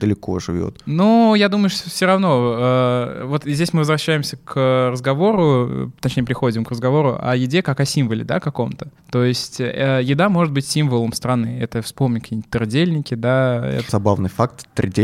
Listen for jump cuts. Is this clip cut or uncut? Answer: cut